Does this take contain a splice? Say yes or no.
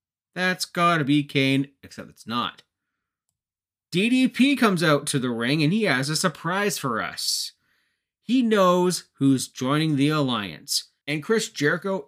yes